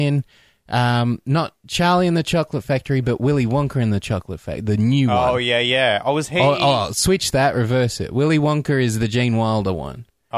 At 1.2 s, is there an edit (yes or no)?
no